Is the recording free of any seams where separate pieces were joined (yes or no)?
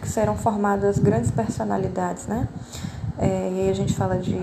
yes